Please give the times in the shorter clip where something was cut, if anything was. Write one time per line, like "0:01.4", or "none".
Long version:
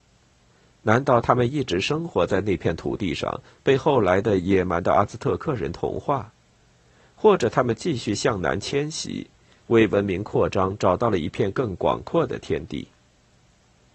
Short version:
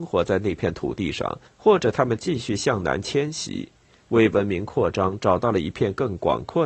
0:01.5